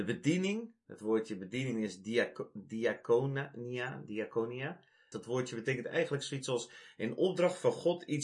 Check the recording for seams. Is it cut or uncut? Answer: cut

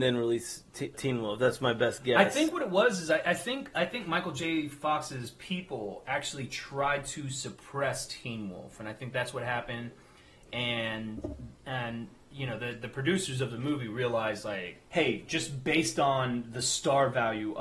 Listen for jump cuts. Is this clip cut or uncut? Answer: cut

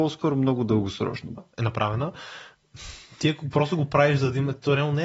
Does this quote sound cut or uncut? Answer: cut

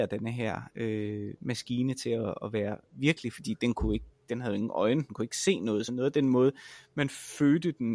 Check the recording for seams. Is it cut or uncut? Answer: uncut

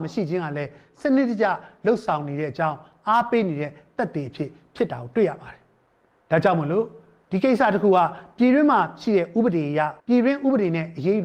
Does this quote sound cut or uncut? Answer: cut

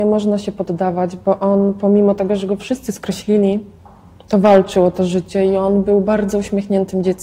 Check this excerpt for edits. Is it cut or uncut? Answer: uncut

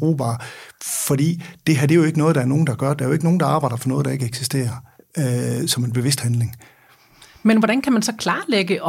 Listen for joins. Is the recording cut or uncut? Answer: uncut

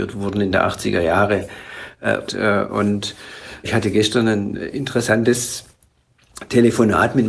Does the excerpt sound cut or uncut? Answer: cut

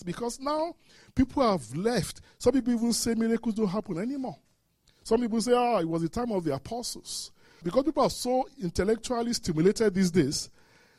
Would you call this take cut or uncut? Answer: uncut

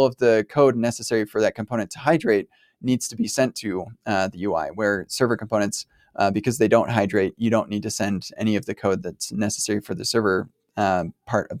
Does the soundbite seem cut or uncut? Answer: uncut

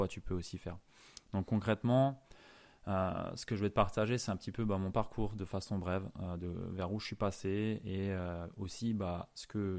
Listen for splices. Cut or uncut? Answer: uncut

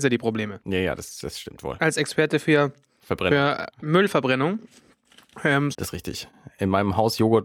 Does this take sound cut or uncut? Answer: cut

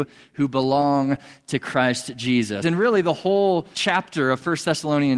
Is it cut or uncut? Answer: cut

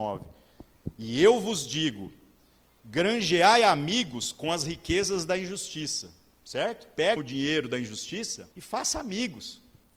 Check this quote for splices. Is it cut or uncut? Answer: cut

